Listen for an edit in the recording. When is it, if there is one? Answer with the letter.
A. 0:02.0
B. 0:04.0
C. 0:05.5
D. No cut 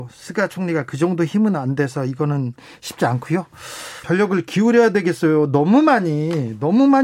B